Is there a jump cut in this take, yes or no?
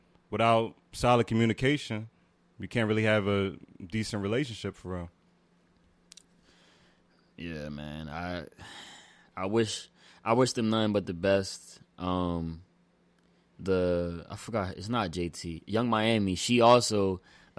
no